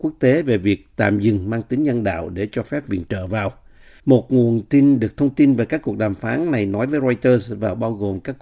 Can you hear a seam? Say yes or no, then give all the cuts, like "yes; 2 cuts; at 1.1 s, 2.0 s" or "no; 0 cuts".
yes; 1 cut; at 4.0 s